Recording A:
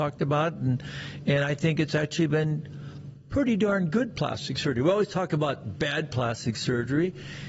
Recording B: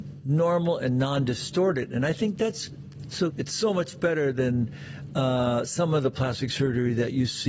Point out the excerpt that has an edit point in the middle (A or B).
B